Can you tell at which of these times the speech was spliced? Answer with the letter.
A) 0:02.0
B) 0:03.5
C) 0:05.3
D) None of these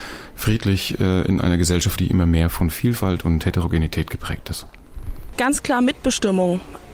A